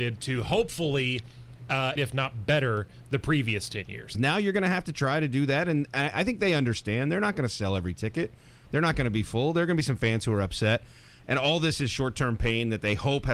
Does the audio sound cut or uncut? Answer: cut